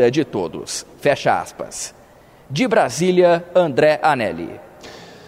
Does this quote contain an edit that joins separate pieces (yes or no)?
no